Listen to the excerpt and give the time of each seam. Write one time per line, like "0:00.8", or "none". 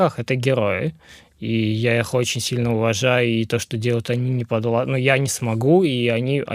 none